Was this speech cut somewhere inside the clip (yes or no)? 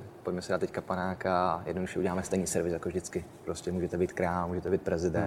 no